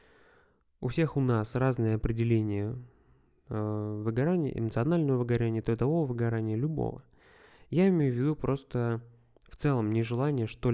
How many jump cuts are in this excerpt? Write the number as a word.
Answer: zero